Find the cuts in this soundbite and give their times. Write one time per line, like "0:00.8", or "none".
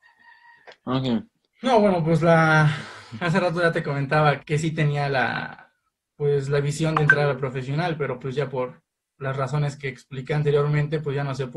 0:01.4
0:04.4